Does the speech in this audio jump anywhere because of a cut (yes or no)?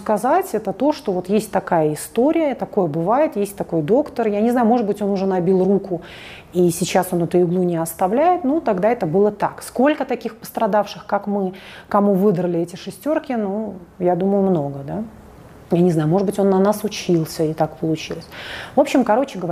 no